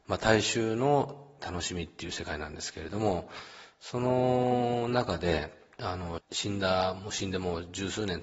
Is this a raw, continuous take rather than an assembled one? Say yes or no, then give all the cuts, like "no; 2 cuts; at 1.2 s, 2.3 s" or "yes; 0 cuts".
no; 1 cut; at 6.2 s